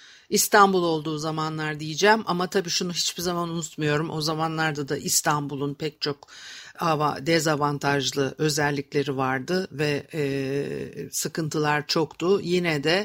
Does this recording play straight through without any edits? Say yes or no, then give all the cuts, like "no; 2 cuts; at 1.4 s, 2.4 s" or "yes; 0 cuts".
yes; 0 cuts